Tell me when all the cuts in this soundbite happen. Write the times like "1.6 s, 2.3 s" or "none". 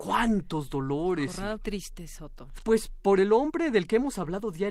1.6 s, 2.6 s